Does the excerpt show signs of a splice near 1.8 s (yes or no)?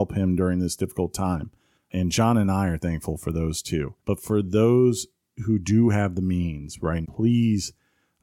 yes